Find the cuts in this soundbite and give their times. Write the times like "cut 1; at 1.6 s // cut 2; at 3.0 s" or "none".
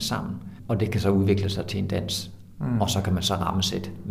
none